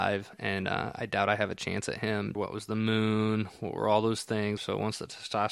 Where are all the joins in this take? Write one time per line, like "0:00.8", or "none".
0:02.3
0:04.6